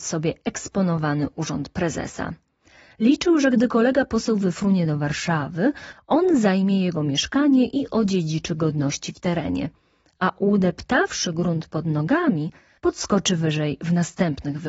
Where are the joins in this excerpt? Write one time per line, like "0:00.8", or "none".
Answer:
none